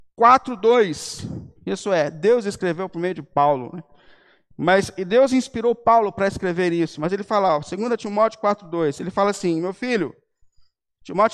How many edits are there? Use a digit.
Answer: 1